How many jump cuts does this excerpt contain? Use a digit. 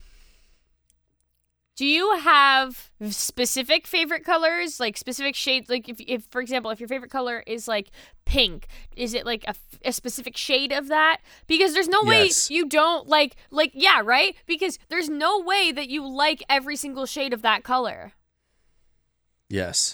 0